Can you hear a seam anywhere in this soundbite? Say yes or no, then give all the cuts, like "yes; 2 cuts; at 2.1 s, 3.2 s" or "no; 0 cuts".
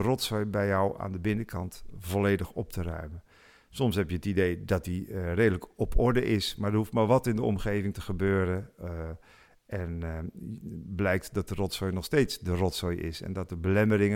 no; 0 cuts